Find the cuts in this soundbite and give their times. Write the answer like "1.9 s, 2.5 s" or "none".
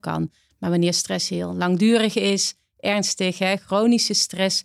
none